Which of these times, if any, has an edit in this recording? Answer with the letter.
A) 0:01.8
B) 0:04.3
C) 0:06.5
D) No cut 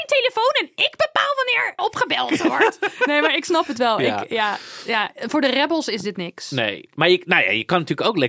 A